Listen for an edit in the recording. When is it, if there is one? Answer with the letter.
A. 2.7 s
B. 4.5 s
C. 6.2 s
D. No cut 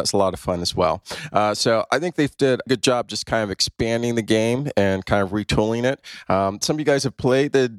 A